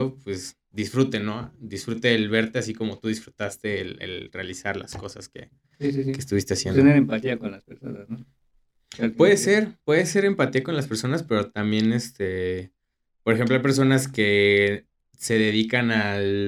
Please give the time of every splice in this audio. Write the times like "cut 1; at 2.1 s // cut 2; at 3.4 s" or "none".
none